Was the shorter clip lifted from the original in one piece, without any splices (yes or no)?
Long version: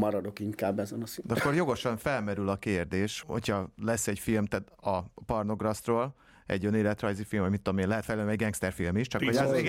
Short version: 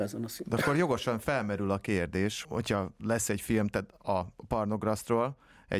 yes